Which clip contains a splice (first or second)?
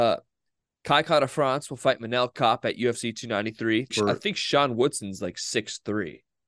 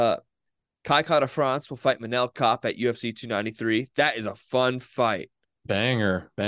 first